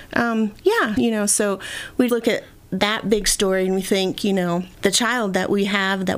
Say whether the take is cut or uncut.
cut